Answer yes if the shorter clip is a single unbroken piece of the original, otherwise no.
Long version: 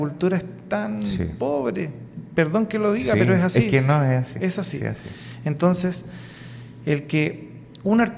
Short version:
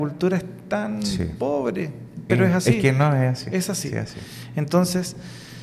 no